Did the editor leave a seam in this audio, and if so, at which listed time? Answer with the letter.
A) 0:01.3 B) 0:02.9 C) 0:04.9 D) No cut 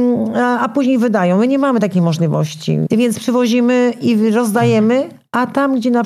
B